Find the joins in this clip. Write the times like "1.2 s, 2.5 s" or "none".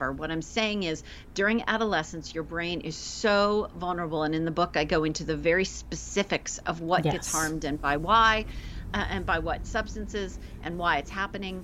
none